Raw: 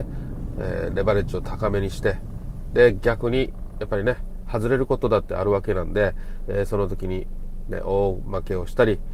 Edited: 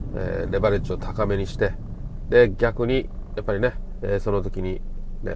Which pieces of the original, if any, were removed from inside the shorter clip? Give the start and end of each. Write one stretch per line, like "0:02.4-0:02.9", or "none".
0:04.4-0:06.5